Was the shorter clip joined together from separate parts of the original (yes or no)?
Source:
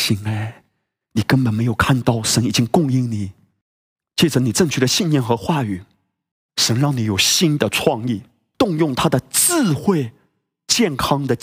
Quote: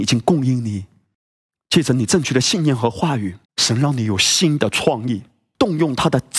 yes